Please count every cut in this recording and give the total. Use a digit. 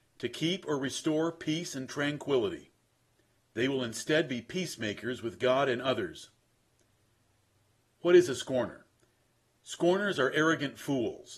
1